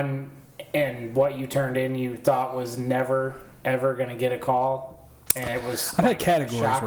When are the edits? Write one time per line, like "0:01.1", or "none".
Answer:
none